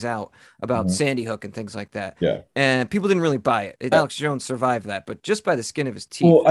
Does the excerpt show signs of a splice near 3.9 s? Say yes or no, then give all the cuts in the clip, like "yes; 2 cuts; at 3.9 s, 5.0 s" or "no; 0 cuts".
yes; 1 cut; at 3.9 s